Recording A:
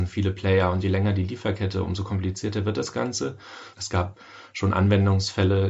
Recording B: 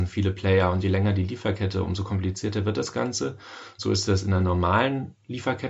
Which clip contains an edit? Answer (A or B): A